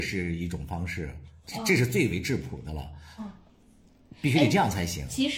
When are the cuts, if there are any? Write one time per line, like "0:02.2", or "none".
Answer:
0:03.2